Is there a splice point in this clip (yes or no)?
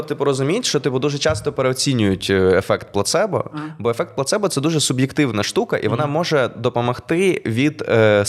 no